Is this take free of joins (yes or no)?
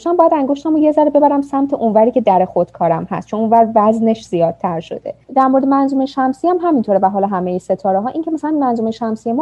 no